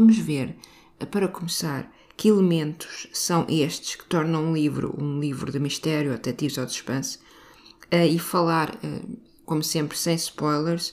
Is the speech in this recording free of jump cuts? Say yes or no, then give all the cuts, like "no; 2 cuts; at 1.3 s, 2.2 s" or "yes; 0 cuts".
yes; 0 cuts